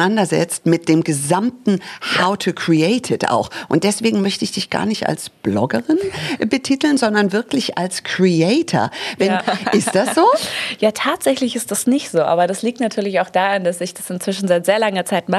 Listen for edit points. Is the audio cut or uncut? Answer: cut